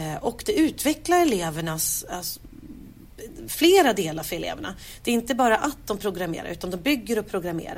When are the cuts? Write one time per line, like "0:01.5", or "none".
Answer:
none